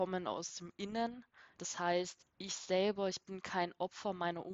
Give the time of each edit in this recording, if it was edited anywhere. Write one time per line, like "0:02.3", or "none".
0:01.6